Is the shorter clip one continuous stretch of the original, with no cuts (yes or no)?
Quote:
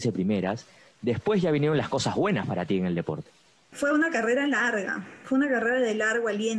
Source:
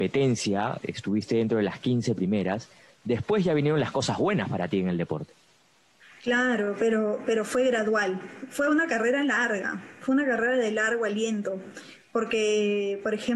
no